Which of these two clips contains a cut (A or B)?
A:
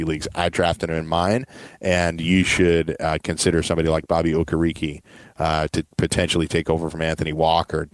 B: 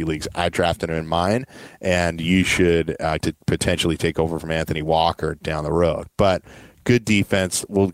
B